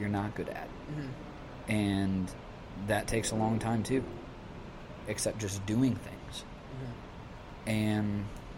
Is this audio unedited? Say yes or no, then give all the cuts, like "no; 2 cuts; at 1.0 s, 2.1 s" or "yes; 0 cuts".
no; 1 cut; at 5.0 s